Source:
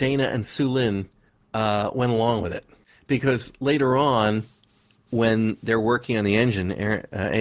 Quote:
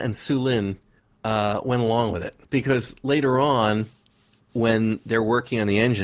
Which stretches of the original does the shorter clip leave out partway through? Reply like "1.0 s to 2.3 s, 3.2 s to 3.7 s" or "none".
2.7 s to 3.0 s